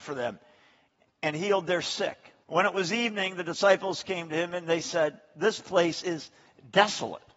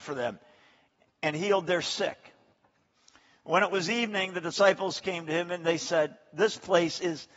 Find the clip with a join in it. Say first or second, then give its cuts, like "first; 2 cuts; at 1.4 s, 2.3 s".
first; 1 cut; at 2.4 s